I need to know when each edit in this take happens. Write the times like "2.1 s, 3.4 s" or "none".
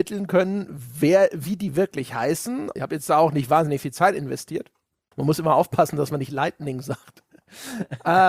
2.8 s, 5.1 s